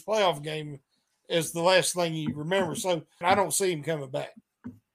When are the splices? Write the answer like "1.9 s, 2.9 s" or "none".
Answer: 3.2 s